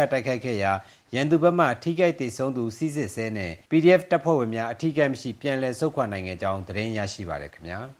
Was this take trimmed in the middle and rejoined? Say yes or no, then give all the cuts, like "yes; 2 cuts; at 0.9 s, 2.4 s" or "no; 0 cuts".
yes; 1 cut; at 3.6 s